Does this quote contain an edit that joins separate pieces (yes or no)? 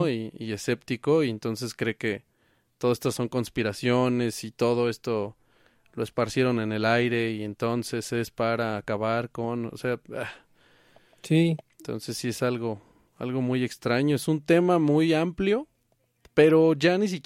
no